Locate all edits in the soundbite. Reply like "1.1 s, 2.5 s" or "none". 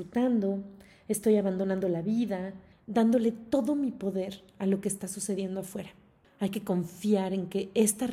2.7 s, 6.2 s